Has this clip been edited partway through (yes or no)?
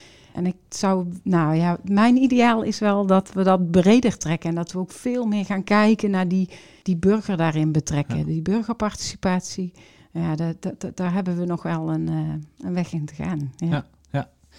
no